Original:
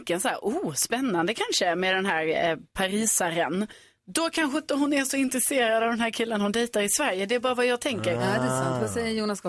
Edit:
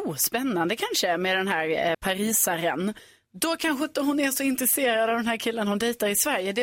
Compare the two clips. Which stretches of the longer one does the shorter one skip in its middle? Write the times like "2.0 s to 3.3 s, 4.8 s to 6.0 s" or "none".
2.5 s to 2.7 s

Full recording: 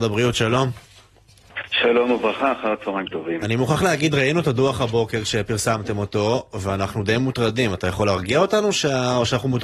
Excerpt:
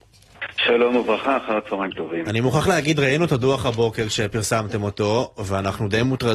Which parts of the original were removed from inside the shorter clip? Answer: none

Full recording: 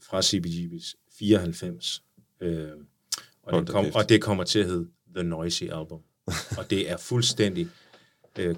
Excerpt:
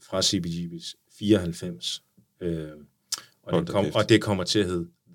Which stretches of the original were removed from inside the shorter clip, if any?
none

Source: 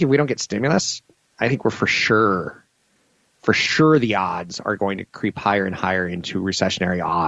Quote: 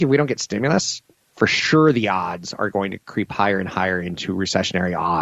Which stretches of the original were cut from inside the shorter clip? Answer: 1.2 s to 3.3 s

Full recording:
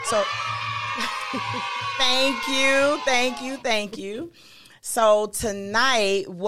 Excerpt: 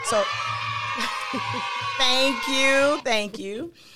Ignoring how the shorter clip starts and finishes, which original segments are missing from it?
3.0 s to 3.6 s

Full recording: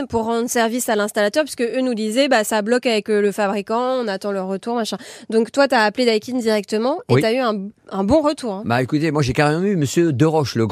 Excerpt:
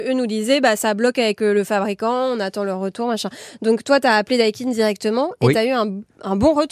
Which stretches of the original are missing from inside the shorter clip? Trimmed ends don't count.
none

